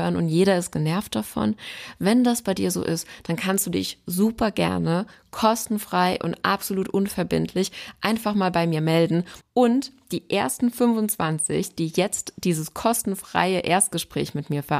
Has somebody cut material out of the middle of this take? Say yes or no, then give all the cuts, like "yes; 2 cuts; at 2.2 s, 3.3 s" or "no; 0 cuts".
yes; 1 cut; at 9.4 s